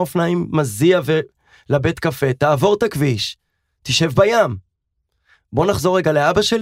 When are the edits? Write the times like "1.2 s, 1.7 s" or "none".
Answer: none

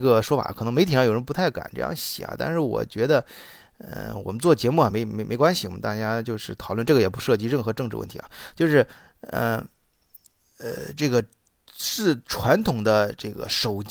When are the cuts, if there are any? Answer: none

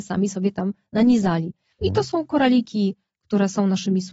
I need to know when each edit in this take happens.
1.8 s

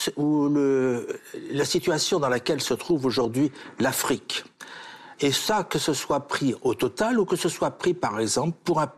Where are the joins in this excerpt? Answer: 5.2 s

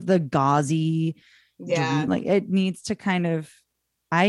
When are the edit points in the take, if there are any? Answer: 2.1 s

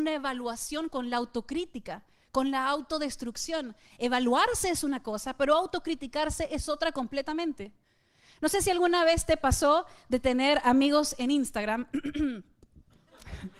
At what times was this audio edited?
none

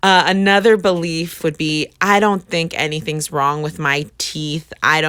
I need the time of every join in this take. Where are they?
1.4 s

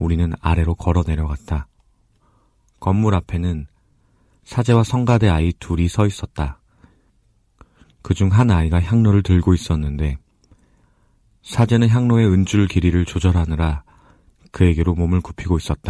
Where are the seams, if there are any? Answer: none

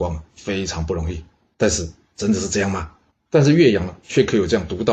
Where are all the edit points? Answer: 1.5 s, 3.1 s

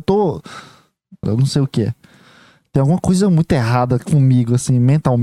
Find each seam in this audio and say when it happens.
1.2 s

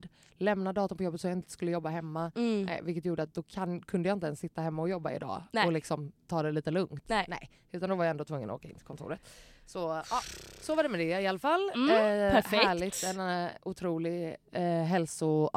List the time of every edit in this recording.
none

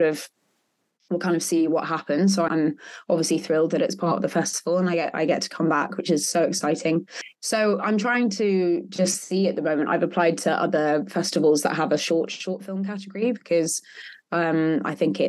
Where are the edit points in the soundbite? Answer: 2.5 s

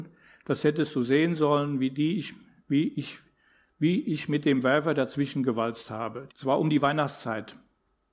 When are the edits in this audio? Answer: 6.3 s

